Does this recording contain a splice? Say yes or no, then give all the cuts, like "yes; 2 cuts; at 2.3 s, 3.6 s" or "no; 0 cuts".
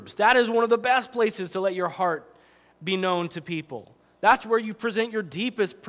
no; 0 cuts